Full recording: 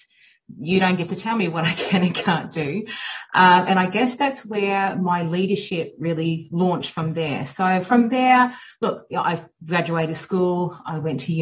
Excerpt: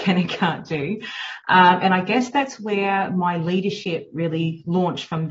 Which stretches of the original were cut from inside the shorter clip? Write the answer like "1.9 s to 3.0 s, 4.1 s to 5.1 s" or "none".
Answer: none

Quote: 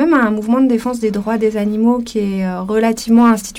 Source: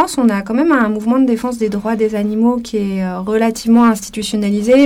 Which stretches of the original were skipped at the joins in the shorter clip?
none

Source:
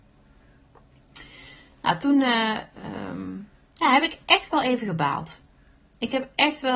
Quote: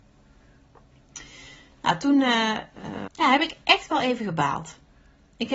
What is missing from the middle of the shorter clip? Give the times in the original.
3.1 s to 3.7 s

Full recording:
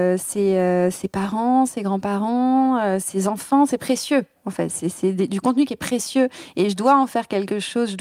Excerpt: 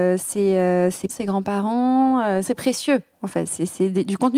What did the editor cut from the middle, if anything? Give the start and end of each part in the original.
1.1 s to 1.7 s, 3.0 s to 3.7 s

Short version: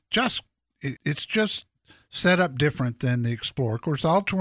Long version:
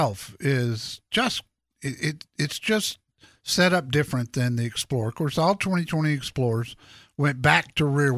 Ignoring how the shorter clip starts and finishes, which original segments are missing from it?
2.0 s to 2.3 s

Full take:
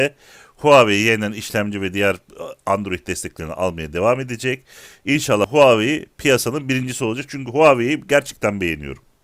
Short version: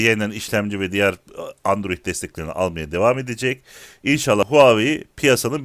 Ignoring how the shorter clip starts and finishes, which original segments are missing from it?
none

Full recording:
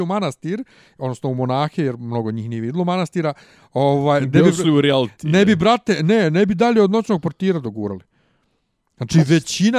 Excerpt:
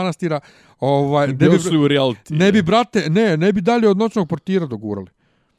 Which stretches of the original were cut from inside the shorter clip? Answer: none

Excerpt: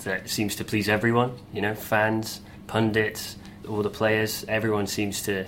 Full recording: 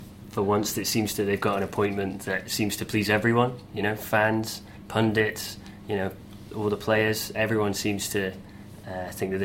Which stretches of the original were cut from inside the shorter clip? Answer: 5.8 s to 6.5 s

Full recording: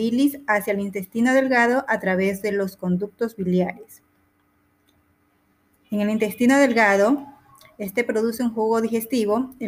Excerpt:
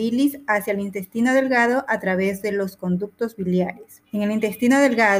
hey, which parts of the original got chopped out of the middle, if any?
4.0 s to 5.8 s

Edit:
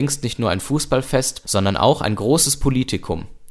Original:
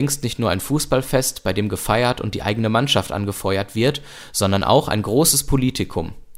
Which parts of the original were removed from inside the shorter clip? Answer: 1.4 s to 4.3 s

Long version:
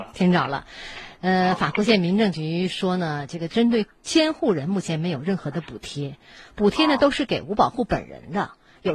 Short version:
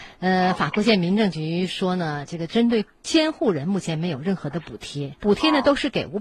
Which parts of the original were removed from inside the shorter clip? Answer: 6.2 s to 6.5 s

